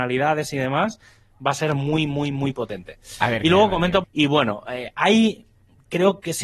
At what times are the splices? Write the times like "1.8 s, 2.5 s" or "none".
4.0 s